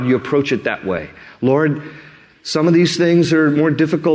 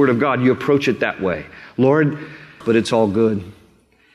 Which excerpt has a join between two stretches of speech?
second; 1 cut; at 2.6 s

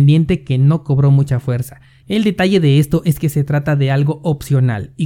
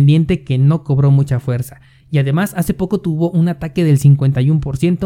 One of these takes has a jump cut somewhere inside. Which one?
first; 1 cut; at 2.0 s

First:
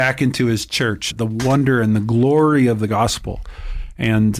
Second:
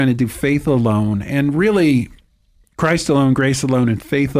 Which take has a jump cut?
first; 1 cut; at 1.1 s

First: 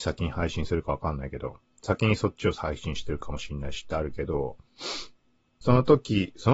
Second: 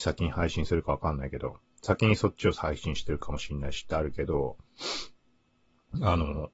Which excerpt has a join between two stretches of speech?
first; 1 cut; at 5.6 s

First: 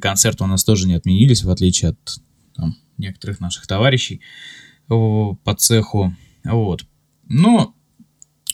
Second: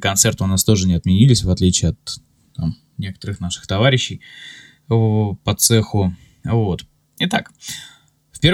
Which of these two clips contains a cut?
second; 1 cut; at 7.2 s

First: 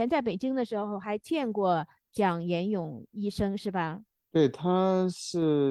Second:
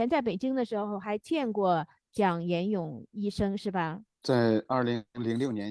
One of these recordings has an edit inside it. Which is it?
second; 1 cut; at 4.1 s

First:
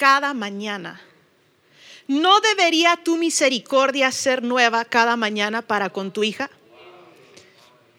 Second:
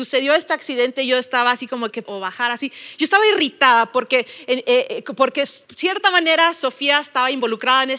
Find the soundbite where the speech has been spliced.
second; 2 cuts; at 2.1 s, 5.6 s

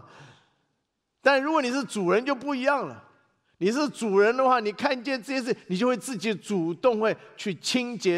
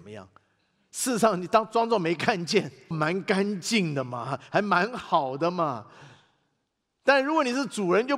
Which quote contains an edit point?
second; 1 cut; at 2.9 s

